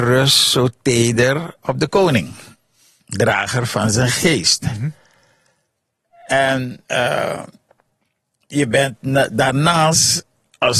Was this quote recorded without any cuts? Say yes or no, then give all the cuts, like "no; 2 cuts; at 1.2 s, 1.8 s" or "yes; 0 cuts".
no; 1 cut; at 6.8 s